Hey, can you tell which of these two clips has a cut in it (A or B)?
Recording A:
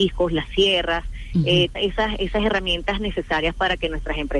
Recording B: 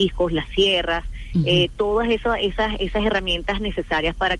A